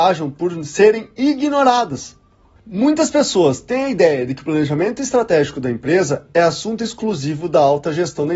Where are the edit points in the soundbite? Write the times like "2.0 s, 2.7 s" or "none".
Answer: 2.6 s